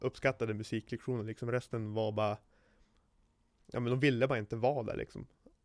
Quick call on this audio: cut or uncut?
uncut